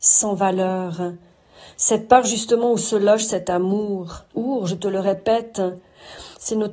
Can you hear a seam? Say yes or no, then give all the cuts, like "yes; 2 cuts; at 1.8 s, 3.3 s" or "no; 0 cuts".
yes; 1 cut; at 4.3 s